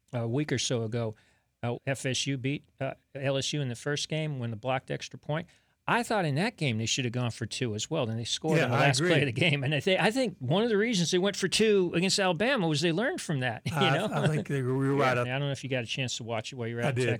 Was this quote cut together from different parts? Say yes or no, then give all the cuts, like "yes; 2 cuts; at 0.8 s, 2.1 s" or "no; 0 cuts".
yes; 2 cuts; at 1.7 s, 15.2 s